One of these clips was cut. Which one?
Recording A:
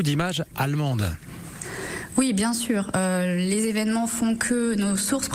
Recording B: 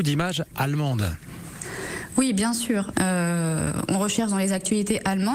B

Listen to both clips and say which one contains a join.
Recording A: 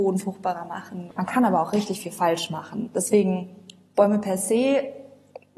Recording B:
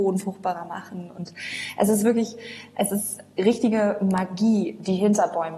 A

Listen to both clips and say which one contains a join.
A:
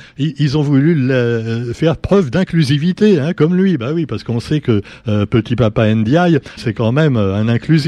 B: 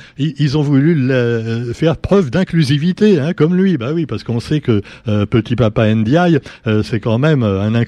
A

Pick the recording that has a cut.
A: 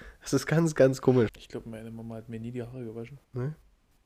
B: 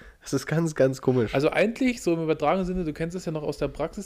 A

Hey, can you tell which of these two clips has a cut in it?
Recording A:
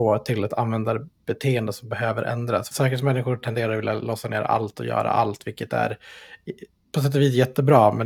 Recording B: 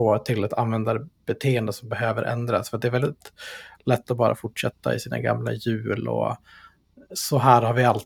A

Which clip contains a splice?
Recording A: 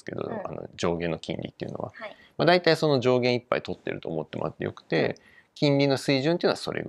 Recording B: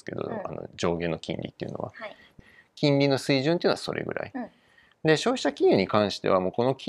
B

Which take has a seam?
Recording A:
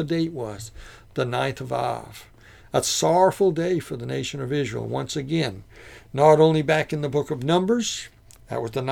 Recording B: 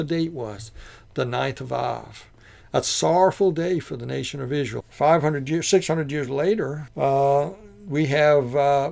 B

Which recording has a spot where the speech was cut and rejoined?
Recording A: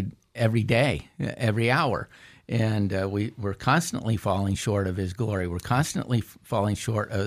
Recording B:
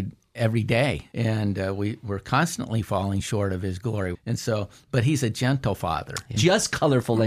B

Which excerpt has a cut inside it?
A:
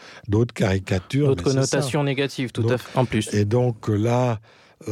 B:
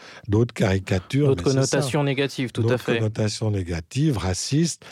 A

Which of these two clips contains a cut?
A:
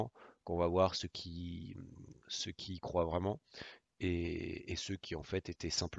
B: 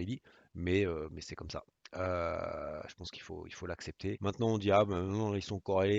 B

